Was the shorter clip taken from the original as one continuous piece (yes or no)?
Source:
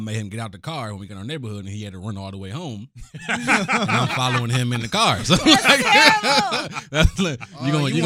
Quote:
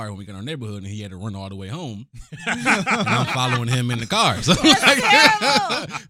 yes